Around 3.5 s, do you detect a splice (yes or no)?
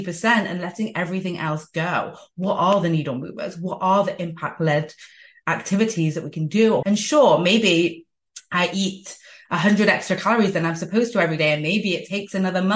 no